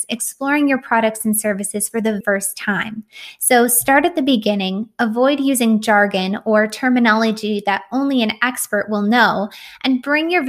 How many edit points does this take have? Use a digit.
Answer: 1